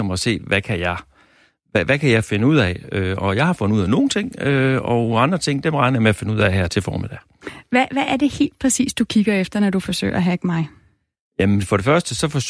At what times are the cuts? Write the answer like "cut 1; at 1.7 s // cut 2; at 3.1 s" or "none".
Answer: cut 1; at 6.7 s